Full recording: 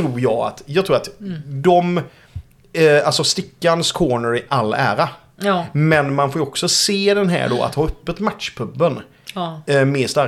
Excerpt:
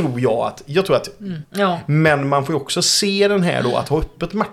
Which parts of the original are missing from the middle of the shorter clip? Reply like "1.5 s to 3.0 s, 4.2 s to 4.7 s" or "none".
1.4 s to 5.3 s